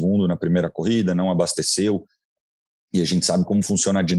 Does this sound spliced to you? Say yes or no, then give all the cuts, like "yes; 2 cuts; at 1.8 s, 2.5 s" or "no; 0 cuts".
no; 0 cuts